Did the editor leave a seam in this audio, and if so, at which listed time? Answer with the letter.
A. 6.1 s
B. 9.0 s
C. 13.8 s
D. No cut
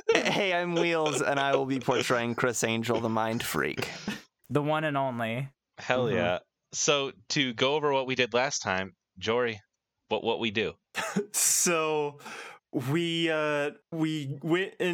C